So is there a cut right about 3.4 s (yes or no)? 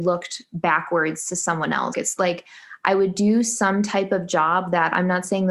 no